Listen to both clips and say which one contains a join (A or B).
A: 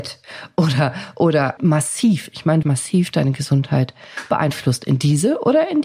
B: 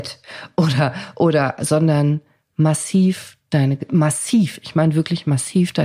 A